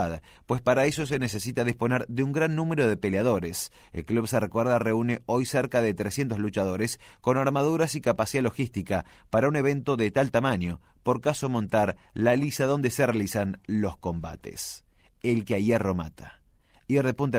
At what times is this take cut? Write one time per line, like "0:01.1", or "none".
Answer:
none

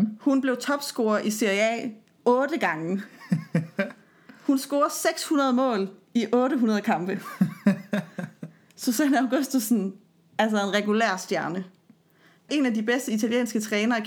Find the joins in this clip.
0:12.5

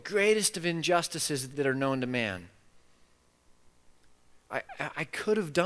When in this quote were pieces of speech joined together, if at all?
0:01.5

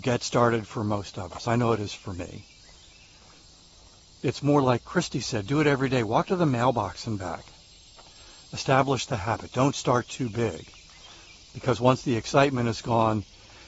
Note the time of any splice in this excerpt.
none

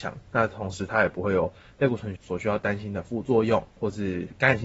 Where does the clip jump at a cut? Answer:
0:02.2

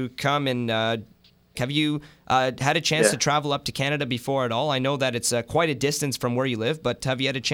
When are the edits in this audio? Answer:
0:01.5

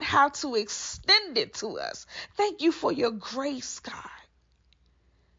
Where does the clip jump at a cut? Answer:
none

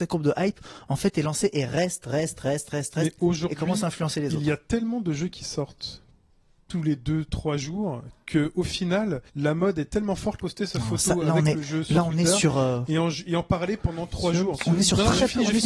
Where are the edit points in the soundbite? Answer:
0:09.3
0:10.4

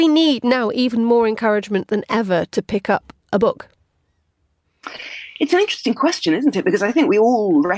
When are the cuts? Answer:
none

